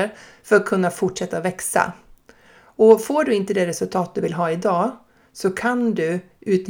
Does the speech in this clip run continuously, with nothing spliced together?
yes; 0 cuts

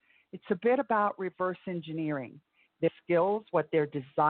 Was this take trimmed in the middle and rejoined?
yes; 1 cut; at 2.6 s

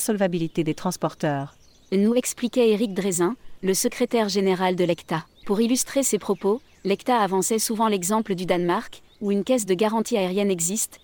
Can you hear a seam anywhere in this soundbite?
yes; 1 cut; at 5.4 s

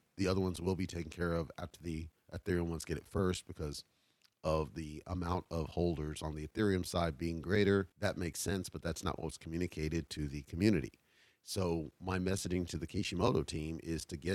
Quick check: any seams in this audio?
yes; 1 cut; at 7.9 s

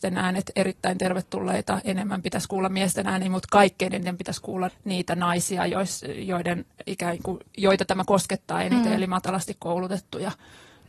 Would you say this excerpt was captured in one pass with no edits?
no; 1 cut; at 4.7 s

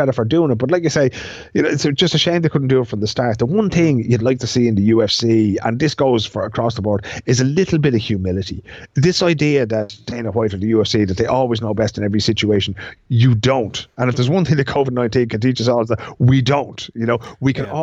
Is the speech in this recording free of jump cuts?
yes; 0 cuts

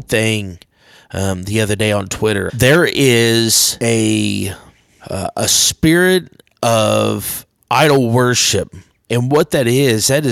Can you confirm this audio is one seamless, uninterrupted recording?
no; 2 cuts; at 2.5 s, 9.1 s

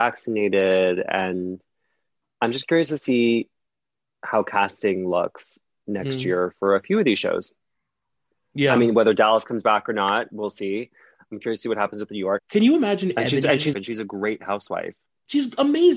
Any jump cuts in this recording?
yes; 2 cuts; at 12.4 s, 13.7 s

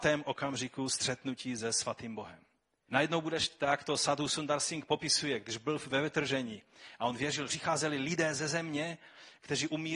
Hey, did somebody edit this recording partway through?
yes; 2 cuts; at 2.9 s, 7.5 s

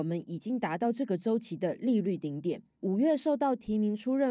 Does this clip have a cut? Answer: yes; 1 cut; at 2.7 s

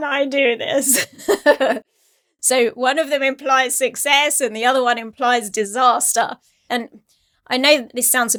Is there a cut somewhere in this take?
yes; 1 cut; at 6.7 s

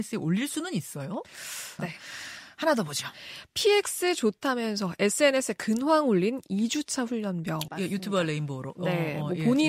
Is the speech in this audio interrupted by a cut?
yes; 2 cuts; at 1.8 s, 7.7 s

